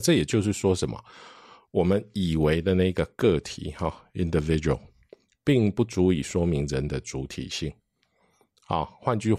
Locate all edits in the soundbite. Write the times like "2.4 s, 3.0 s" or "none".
none